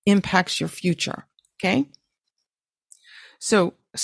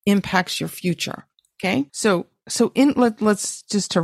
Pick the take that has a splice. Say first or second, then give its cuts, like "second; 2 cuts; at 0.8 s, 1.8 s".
second; 1 cut; at 1.9 s